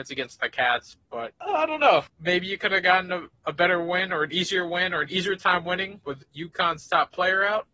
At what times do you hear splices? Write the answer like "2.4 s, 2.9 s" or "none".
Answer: 2.1 s